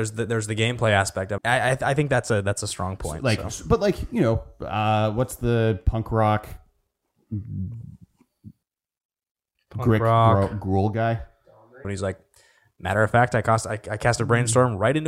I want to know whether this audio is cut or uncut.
cut